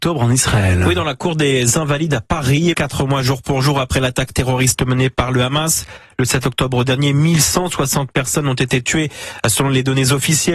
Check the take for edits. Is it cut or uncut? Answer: cut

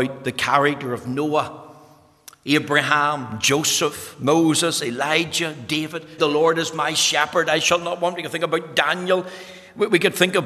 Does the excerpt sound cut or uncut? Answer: cut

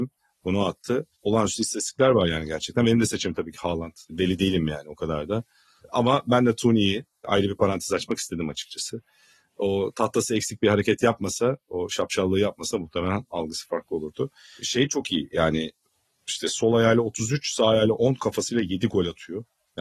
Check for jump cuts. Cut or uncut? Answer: uncut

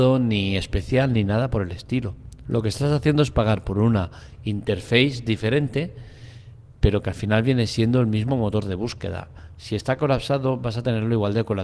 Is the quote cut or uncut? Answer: uncut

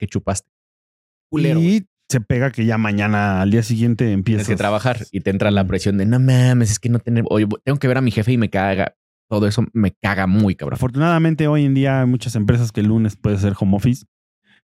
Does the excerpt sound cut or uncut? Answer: cut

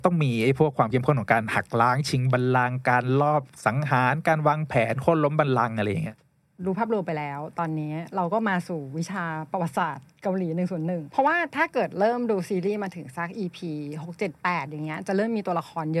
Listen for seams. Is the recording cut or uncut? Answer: uncut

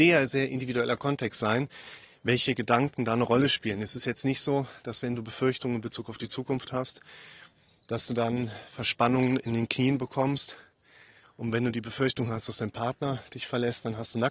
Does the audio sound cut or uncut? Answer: uncut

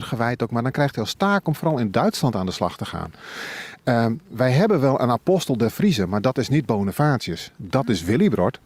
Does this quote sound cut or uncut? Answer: uncut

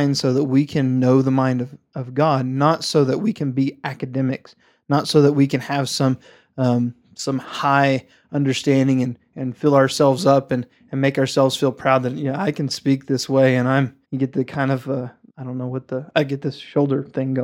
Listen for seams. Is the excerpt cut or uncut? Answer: cut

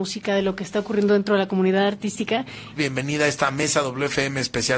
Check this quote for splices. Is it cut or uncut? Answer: cut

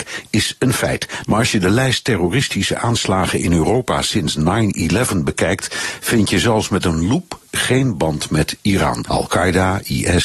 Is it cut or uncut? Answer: cut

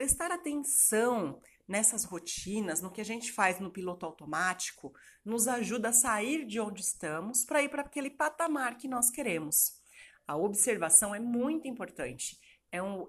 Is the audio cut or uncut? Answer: uncut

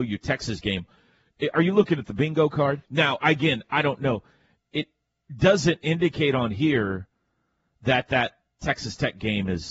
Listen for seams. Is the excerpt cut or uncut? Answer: cut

